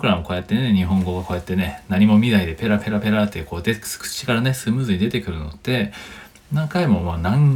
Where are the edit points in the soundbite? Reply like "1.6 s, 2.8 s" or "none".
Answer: none